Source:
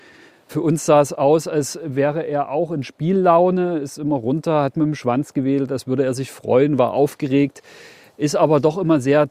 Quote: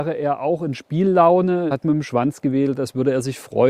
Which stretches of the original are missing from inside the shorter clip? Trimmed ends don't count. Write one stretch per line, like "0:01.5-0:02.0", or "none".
0:03.8-0:04.6

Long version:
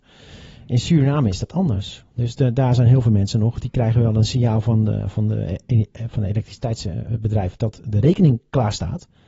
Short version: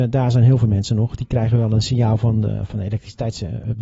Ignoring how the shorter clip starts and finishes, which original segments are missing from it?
0:05.1-0:06.1

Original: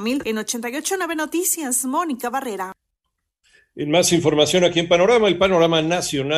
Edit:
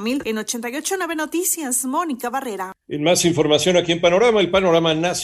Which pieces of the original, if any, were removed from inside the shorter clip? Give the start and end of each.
0:02.8-0:03.7

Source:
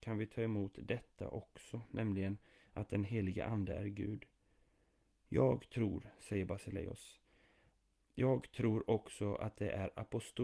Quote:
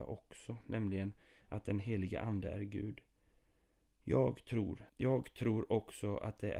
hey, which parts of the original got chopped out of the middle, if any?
0:06.1-0:08.1

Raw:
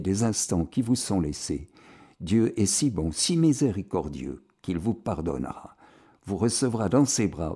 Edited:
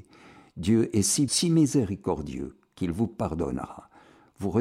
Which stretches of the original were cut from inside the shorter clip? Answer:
0:02.9-0:03.1

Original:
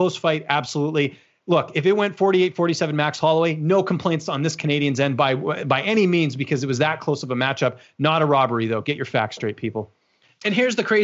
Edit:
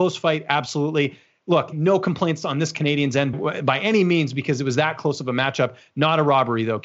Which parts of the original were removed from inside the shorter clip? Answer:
0:01.7-0:03.6
0:05.2-0:05.4

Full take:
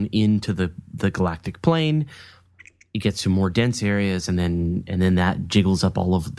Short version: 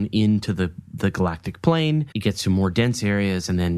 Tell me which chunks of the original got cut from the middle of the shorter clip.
0:02.1-0:02.9

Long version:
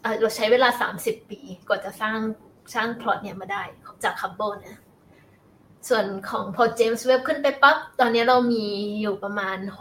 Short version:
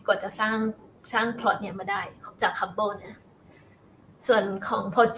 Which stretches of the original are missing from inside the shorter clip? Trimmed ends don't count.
none

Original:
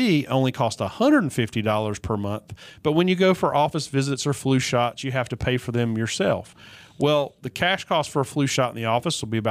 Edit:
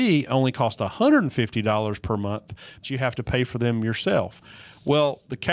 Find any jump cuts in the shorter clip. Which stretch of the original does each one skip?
0:02.8-0:05.0

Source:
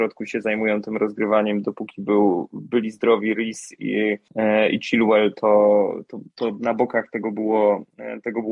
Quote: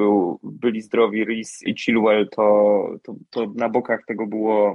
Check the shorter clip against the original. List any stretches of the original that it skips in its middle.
0:03.8-0:04.7

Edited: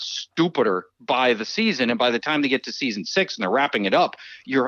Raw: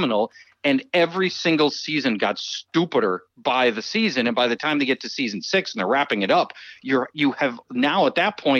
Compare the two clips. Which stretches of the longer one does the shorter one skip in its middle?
none

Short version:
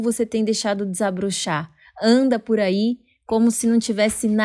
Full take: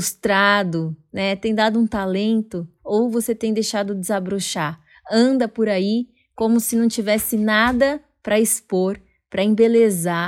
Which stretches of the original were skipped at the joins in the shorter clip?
none

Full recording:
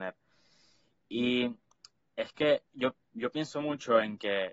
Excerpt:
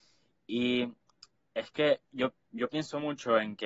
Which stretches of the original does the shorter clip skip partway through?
none

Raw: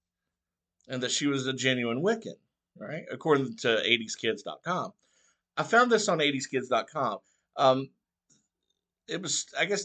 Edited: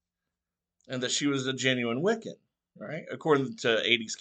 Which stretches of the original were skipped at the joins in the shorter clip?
none

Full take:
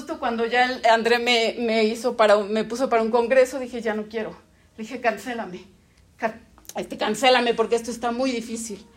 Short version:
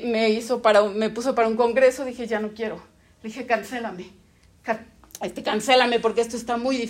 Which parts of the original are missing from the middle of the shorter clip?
none

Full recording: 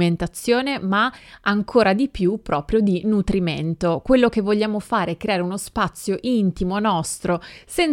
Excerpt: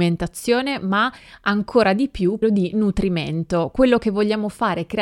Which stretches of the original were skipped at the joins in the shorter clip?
0:02.4-0:02.7

